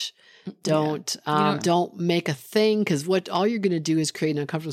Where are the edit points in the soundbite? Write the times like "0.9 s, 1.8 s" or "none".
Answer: 1.6 s